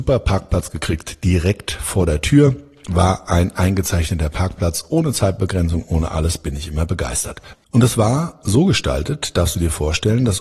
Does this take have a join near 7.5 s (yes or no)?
yes